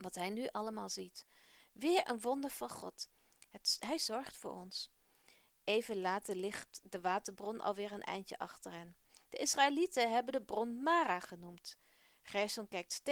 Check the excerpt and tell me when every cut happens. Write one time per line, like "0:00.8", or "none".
0:01.6